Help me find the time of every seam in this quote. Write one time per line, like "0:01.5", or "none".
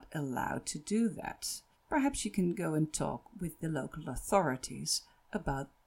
0:01.7

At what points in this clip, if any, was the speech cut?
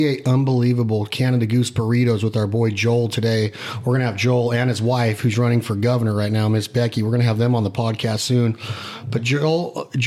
none

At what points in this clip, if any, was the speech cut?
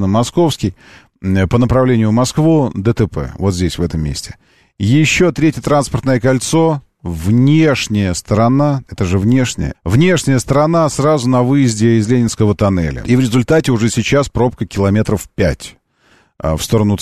0:09.7
0:13.0

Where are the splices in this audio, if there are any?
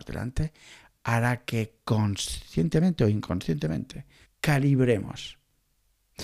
0:04.2

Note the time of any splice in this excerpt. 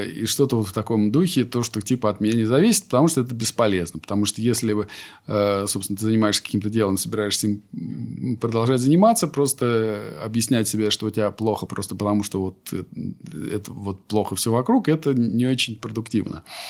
none

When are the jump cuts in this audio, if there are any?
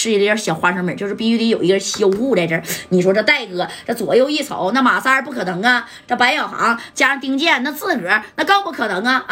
none

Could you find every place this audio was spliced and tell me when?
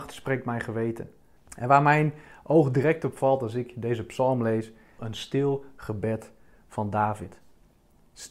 0:01.4
0:05.0

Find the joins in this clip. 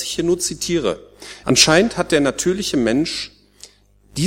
0:01.4

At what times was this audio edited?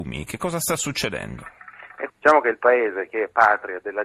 0:02.1

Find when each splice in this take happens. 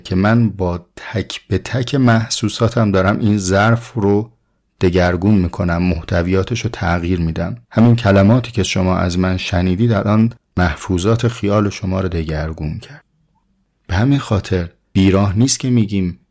0:07.6

